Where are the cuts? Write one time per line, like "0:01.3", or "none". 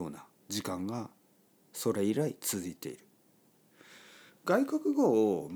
none